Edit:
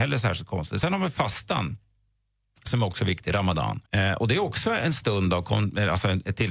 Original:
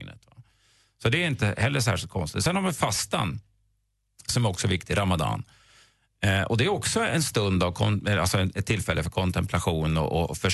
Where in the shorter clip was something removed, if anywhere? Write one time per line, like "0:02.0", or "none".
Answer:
0:03.9